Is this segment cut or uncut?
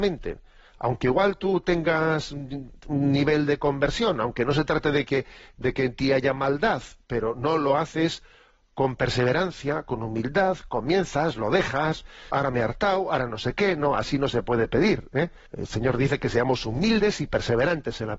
cut